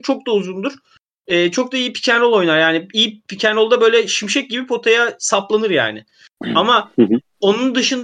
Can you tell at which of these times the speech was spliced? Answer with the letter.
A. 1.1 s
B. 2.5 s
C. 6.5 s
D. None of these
D